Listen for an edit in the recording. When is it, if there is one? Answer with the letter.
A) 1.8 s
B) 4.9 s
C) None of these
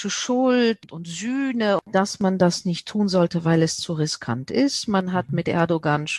A